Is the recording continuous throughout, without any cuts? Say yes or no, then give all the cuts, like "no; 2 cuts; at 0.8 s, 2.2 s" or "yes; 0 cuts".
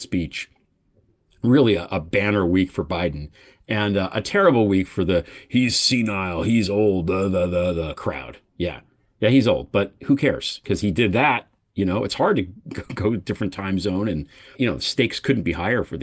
yes; 0 cuts